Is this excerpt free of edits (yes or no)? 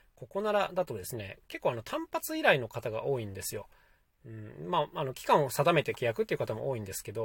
yes